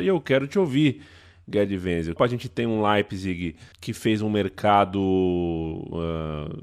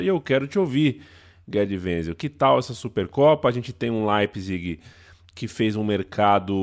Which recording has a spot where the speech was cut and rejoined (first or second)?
first